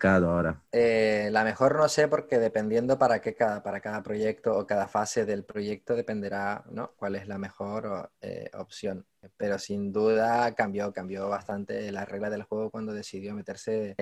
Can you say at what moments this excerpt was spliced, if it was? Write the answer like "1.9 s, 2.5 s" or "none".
none